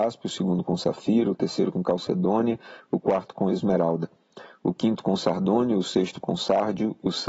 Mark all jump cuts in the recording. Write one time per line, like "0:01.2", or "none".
none

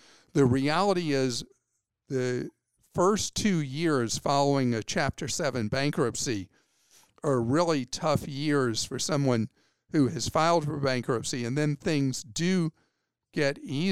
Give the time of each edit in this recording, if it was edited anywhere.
none

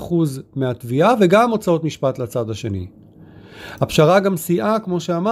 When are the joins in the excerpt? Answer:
none

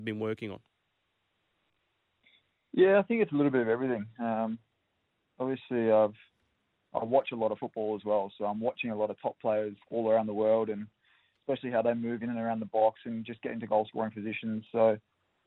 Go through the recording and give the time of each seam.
0:09.8

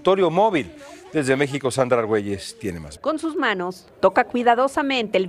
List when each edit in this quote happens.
0:03.0

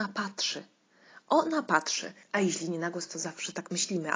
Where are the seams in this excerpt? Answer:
0:02.2

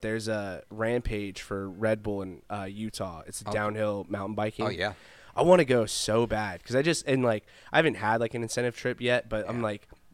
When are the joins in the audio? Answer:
none

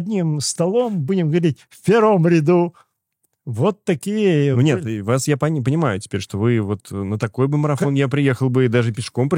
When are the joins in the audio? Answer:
none

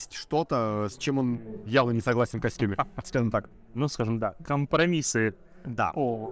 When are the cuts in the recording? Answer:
none

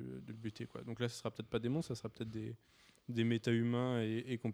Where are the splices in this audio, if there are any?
none

